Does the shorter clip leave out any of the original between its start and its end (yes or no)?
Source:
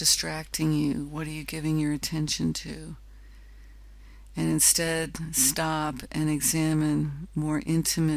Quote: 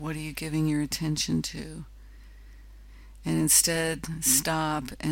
no